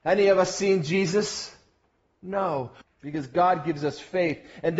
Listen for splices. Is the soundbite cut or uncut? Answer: cut